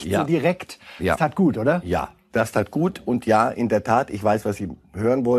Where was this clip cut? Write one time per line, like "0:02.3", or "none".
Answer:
none